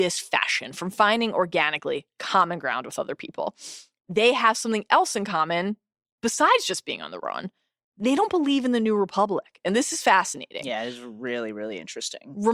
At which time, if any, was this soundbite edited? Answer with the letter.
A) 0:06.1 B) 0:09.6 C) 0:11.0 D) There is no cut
D